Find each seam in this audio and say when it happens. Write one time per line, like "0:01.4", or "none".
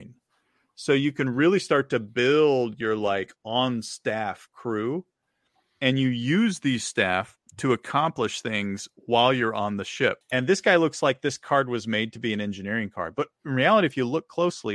0:07.5
0:10.2